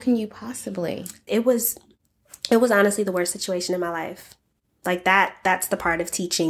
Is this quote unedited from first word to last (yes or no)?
no